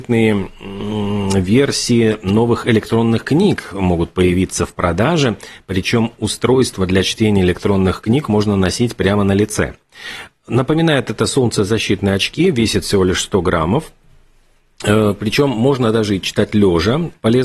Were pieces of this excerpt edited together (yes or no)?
no